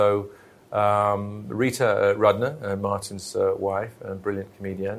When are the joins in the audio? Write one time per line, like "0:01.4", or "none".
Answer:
none